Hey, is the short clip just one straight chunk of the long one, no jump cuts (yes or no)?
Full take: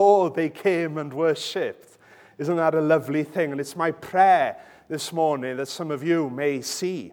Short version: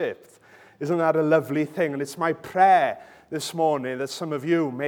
yes